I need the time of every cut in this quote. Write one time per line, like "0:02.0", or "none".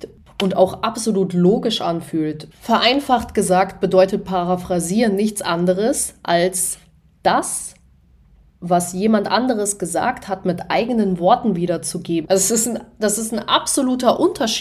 0:02.5
0:12.2